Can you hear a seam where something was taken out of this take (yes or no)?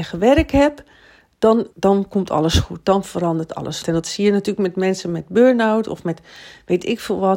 yes